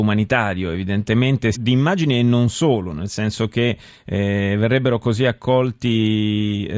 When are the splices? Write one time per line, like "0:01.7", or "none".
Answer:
0:01.5